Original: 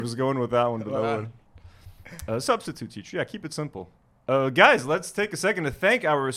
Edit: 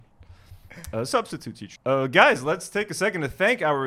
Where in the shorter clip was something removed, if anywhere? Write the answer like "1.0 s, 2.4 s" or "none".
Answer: 1.8 s